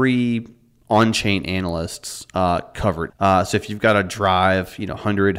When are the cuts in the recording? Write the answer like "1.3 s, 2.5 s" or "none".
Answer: 3.1 s